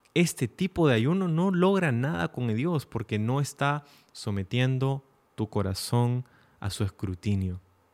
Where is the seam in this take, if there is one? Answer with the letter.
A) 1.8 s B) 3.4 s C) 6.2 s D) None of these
D